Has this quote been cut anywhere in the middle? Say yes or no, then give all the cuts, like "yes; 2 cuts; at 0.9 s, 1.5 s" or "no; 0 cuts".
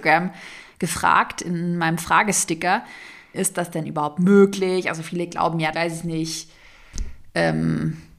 yes; 2 cuts; at 3.3 s, 5.7 s